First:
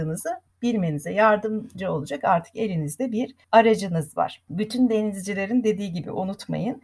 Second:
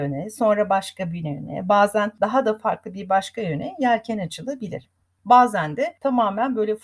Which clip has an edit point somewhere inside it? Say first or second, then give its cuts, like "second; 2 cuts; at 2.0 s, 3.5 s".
second; 1 cut; at 5.2 s